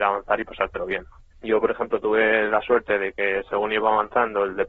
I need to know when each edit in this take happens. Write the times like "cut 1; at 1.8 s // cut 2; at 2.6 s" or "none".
cut 1; at 1.3 s